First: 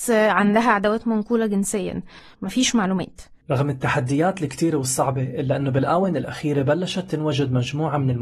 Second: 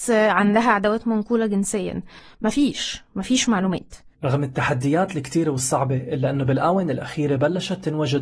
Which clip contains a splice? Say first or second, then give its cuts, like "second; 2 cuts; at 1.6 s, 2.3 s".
first; 1 cut; at 2.3 s